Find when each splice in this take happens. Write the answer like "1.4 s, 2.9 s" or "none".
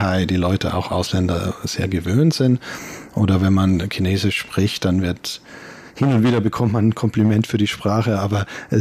3.1 s

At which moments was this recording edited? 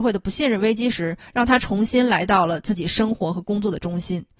1.2 s

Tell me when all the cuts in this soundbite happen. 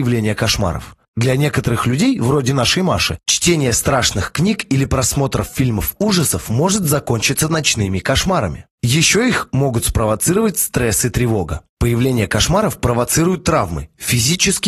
none

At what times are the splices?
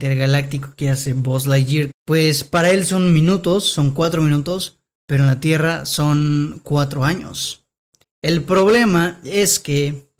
1.9 s, 8.0 s

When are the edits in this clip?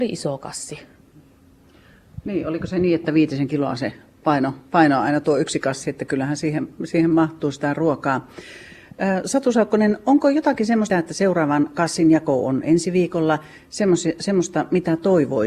10.9 s

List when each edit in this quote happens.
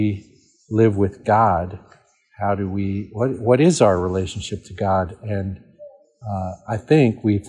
none

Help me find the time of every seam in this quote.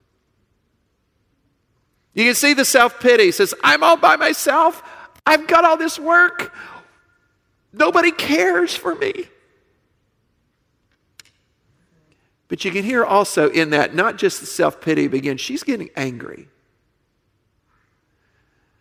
none

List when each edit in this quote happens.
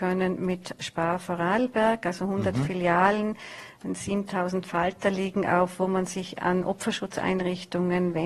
none

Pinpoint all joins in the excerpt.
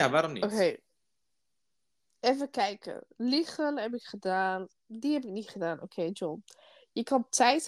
none

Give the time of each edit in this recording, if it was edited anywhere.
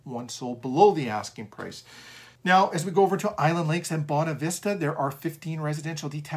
2.4 s

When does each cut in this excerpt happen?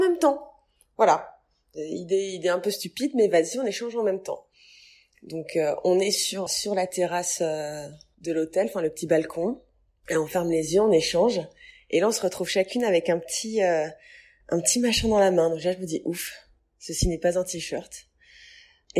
6.5 s

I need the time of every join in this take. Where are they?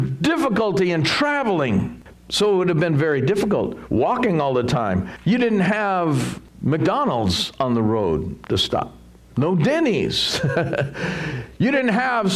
2.1 s

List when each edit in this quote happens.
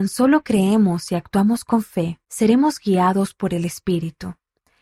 2.2 s

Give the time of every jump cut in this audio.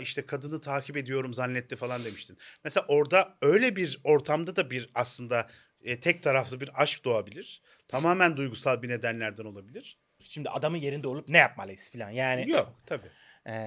10.2 s

